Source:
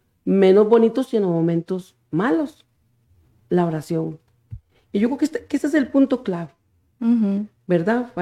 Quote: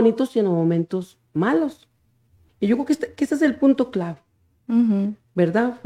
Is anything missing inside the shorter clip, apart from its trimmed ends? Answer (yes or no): yes